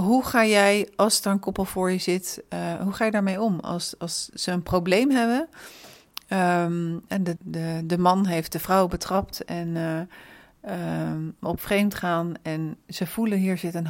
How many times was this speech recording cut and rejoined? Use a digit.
1